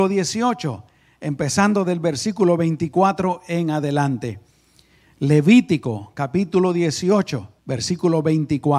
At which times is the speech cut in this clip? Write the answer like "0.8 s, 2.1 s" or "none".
7.6 s